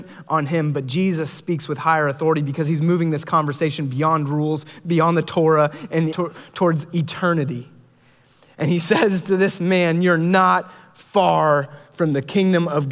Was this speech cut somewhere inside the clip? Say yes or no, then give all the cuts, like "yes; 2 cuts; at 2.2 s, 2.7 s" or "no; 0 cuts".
yes; 1 cut; at 6.1 s